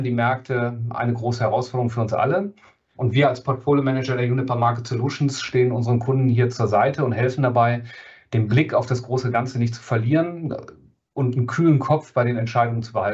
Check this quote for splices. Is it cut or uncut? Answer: cut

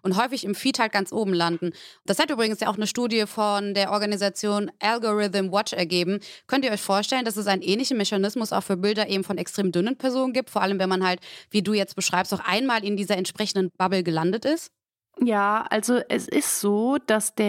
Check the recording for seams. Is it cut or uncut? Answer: uncut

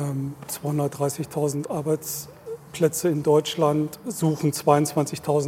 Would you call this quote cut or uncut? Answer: uncut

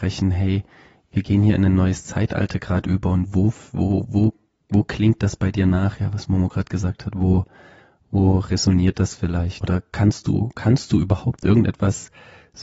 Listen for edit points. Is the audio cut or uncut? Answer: cut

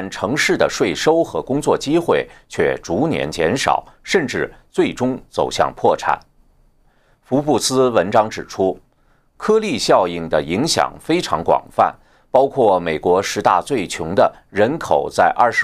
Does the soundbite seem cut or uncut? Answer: uncut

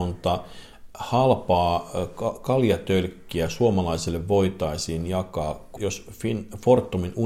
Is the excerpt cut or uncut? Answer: cut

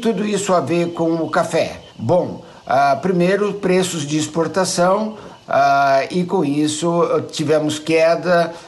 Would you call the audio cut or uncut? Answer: cut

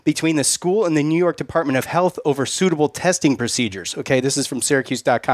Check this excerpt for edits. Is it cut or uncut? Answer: uncut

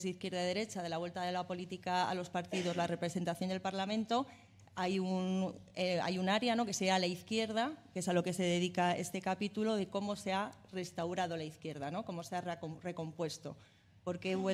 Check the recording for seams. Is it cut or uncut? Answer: uncut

